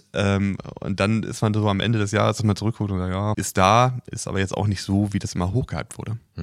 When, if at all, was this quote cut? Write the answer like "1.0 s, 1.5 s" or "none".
3.3 s